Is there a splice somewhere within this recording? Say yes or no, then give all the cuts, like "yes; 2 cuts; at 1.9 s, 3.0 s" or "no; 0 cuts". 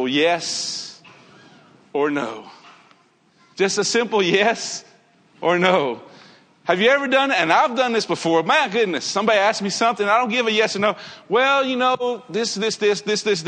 yes; 1 cut; at 3.5 s